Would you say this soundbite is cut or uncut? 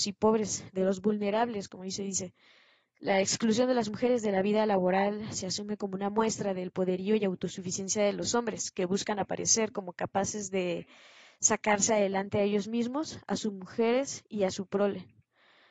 uncut